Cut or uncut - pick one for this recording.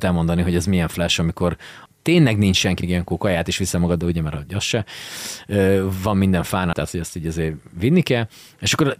cut